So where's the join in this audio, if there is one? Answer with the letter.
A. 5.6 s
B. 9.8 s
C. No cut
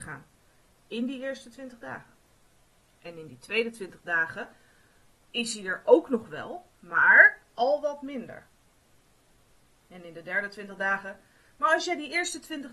C